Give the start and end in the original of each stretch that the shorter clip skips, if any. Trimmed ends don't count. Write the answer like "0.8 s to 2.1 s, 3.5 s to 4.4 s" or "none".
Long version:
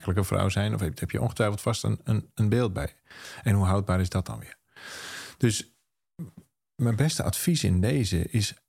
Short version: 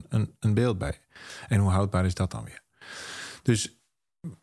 none